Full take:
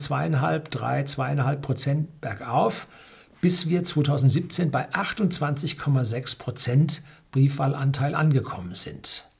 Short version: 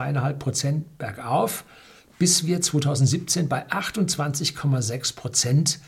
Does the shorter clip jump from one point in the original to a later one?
no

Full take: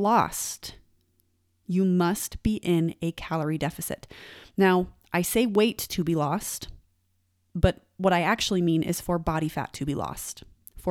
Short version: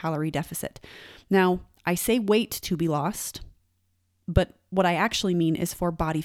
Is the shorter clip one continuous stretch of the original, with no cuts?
yes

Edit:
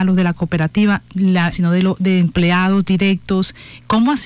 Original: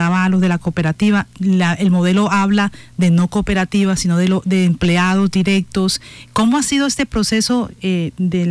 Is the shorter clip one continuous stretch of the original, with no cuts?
no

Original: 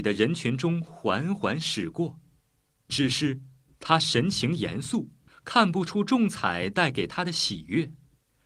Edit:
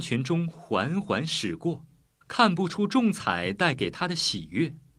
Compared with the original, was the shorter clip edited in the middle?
yes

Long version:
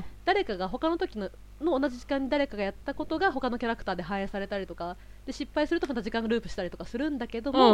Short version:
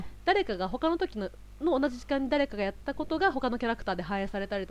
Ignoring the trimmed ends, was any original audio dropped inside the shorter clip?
no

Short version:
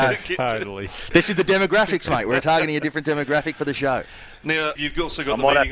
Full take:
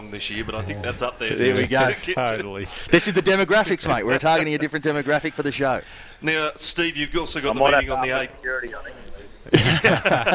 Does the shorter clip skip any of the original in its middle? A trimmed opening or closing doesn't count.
yes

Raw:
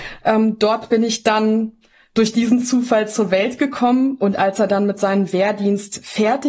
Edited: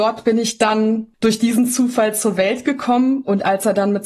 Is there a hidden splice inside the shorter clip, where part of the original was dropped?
yes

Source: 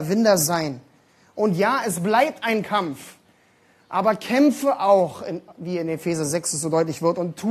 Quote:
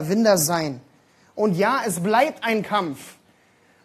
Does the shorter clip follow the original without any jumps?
yes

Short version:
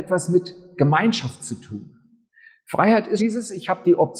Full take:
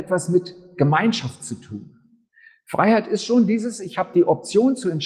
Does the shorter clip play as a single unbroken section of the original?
no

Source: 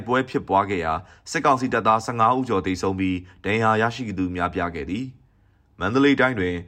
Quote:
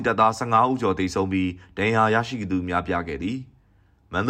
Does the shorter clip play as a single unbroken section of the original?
yes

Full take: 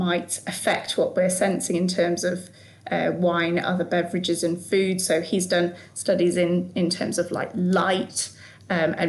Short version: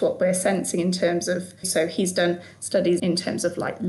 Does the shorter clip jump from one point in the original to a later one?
yes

